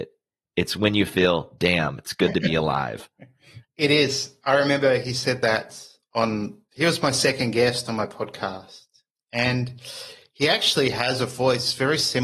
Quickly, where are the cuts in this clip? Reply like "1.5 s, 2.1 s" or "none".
3.6 s